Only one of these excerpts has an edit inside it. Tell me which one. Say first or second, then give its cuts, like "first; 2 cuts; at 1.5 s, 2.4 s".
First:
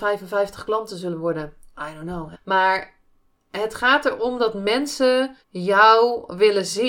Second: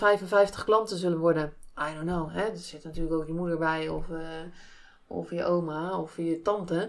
first; 2 cuts; at 2.3 s, 5.4 s